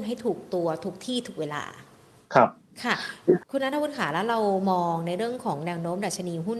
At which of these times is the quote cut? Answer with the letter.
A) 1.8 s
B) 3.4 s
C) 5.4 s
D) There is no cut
B